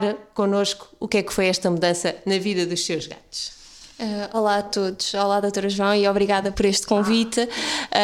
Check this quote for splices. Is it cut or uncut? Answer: cut